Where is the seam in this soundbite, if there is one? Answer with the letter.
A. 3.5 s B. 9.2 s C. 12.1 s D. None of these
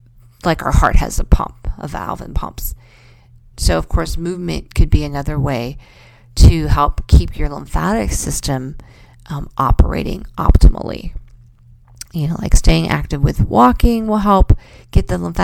A